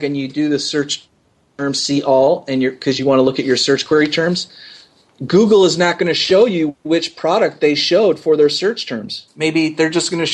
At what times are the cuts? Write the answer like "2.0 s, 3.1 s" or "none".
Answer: 9.3 s